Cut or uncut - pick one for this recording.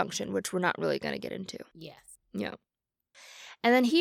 uncut